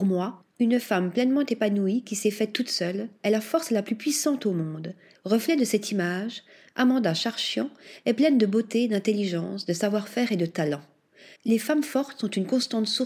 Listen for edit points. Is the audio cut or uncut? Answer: cut